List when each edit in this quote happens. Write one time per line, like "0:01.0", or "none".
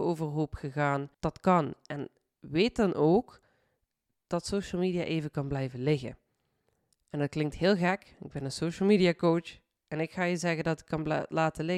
0:01.1